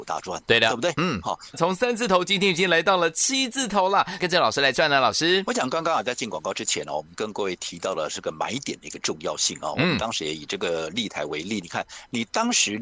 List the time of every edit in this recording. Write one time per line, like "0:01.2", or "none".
0:01.5
0:04.2